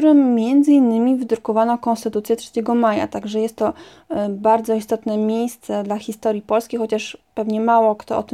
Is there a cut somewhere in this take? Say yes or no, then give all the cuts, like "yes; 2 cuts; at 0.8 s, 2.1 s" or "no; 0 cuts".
no; 0 cuts